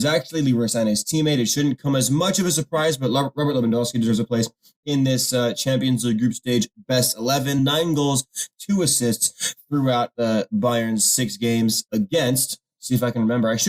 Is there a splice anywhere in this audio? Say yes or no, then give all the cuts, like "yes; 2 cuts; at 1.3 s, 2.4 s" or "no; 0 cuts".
no; 0 cuts